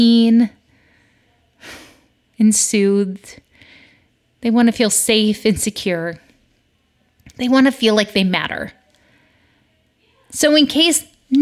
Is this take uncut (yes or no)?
yes